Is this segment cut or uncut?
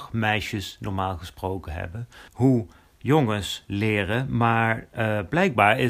cut